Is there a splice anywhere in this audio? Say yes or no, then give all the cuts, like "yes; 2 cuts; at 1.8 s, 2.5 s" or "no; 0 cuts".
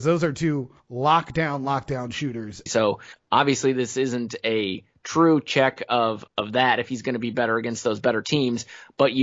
yes; 2 cuts; at 2.7 s, 6.3 s